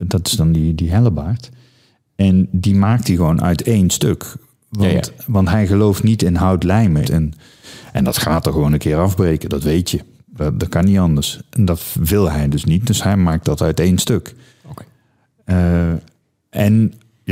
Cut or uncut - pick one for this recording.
cut